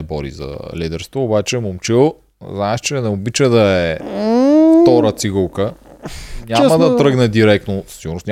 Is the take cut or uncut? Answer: uncut